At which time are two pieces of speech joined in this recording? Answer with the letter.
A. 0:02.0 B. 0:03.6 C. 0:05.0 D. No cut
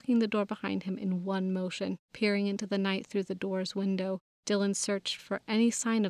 A